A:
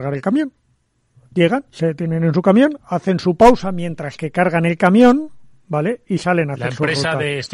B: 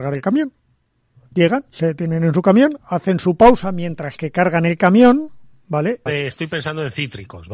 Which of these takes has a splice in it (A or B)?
B